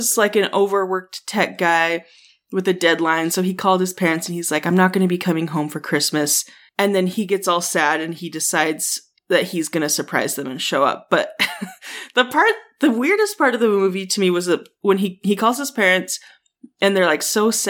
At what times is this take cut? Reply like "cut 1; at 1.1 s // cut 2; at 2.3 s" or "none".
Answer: none

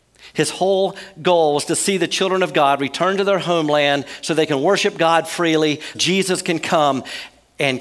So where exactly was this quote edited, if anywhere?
cut 1; at 5.9 s

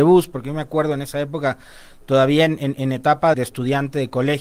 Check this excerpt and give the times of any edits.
cut 1; at 3.3 s

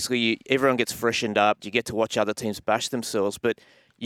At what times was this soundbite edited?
cut 1; at 1.6 s

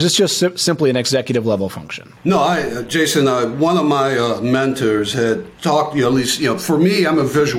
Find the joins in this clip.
cut 1; at 2.2 s // cut 2; at 5.5 s

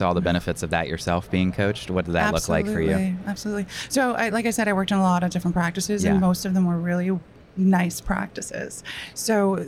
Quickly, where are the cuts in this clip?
none

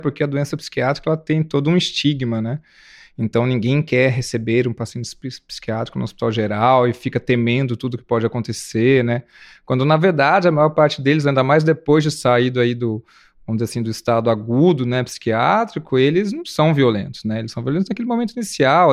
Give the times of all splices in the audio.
none

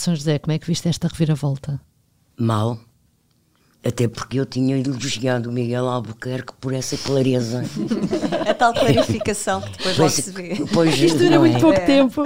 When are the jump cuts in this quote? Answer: none

